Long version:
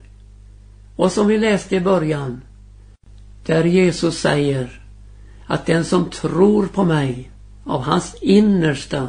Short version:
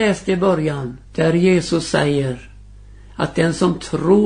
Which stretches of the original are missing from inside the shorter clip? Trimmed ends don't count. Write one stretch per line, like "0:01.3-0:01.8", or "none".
0:02.5-0:03.4